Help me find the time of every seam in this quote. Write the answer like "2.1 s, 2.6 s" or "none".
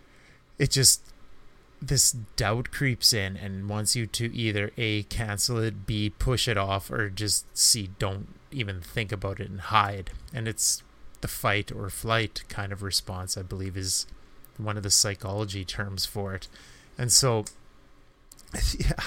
none